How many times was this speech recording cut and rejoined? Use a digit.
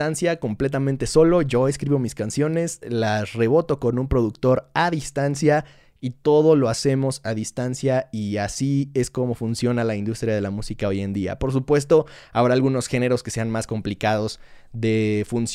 0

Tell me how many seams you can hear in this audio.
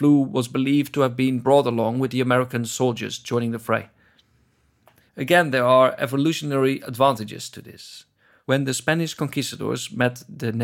1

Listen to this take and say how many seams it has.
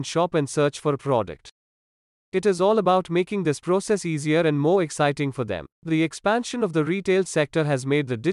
1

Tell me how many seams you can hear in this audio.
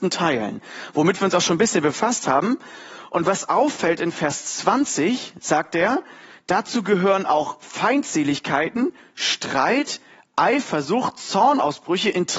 0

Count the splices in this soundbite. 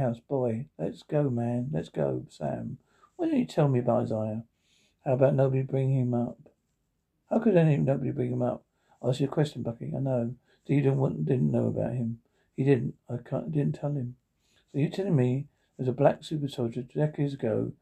0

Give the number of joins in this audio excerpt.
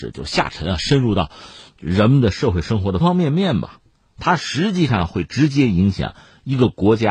1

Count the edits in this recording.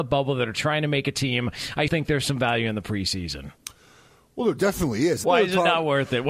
2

